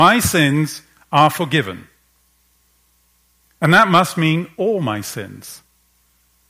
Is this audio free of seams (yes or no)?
yes